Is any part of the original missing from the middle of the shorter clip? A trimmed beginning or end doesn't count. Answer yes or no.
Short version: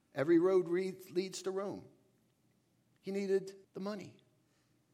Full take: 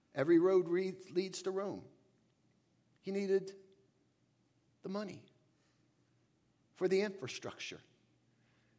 yes